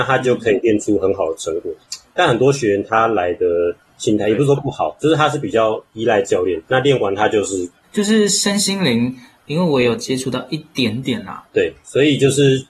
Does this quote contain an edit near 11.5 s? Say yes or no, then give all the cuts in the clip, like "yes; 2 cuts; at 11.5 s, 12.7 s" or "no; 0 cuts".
yes; 2 cuts; at 7.8 s, 11.5 s